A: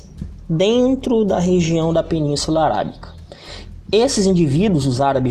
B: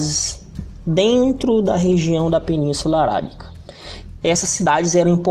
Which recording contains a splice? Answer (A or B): B